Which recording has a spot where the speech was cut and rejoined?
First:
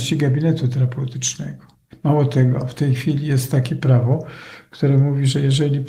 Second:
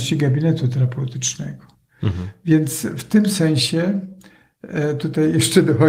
first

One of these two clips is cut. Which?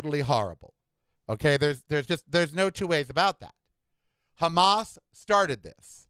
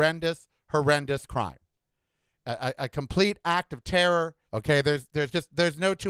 second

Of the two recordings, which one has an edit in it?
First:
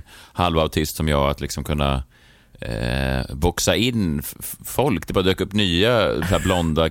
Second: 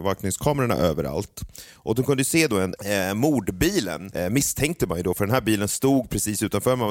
second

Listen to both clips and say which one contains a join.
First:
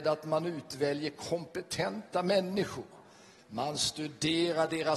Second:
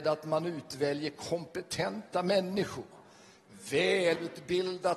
first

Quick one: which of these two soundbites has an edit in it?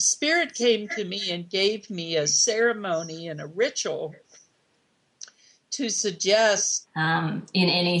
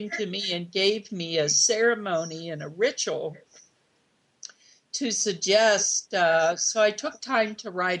first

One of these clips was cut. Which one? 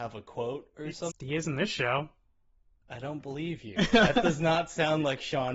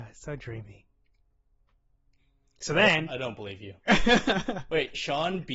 first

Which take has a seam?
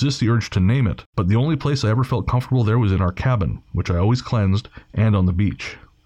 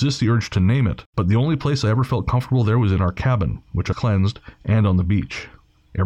second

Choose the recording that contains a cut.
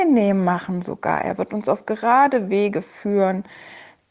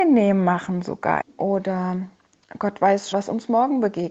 second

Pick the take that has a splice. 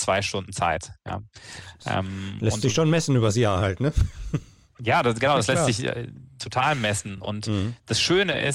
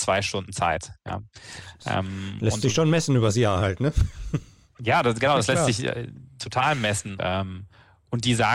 second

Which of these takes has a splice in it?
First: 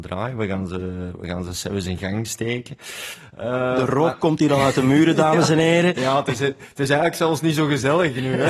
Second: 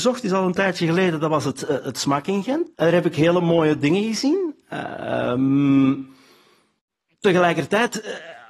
second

